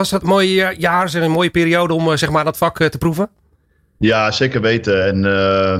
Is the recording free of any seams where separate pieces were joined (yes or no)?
yes